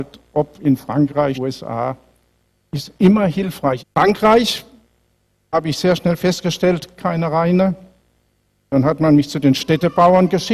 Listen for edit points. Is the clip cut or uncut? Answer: cut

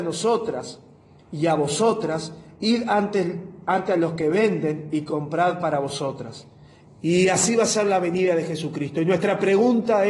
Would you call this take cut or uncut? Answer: cut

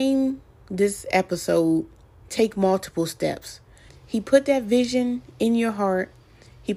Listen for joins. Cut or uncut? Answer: cut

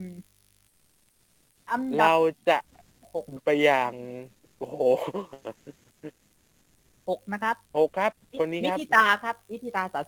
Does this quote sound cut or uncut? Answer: cut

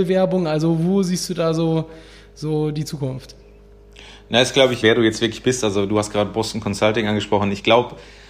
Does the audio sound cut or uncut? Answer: cut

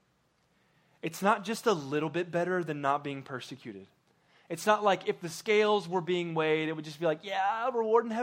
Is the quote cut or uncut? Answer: uncut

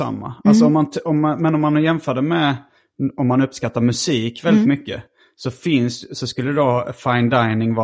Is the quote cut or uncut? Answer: uncut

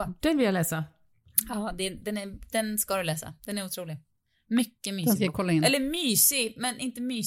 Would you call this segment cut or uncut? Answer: uncut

